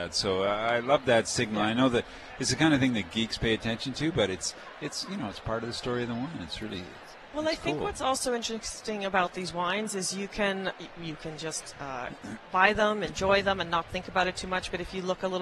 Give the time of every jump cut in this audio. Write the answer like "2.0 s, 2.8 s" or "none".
none

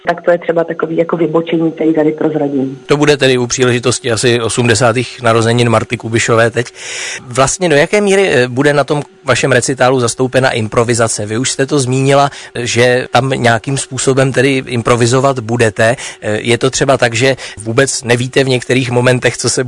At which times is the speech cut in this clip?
none

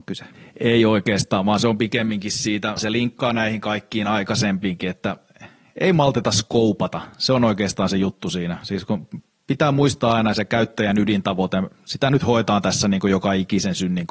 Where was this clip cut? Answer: 2.8 s

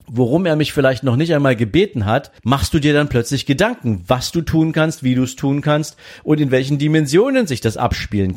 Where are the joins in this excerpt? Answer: 2.4 s

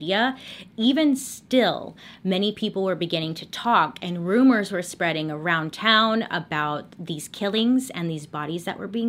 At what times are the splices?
none

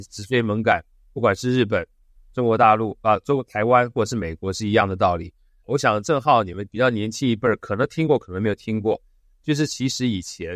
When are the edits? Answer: 5.6 s

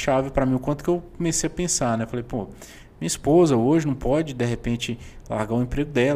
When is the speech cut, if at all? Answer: none

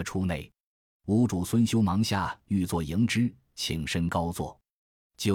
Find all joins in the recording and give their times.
none

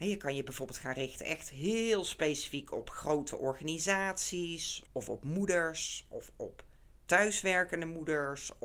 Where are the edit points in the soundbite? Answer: 4.9 s

